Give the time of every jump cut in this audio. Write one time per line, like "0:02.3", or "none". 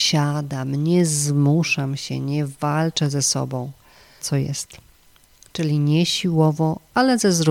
0:04.2